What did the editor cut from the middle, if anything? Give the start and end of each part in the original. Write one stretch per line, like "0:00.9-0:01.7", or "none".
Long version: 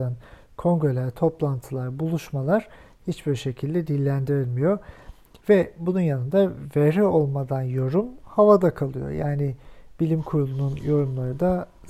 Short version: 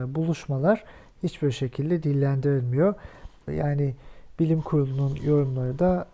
0:05.3-0:09.1